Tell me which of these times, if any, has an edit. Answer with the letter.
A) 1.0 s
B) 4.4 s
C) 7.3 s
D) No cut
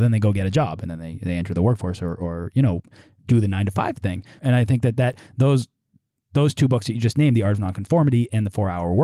B